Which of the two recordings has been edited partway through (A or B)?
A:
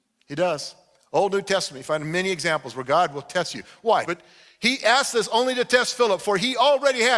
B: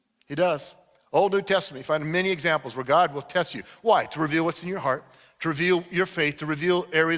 A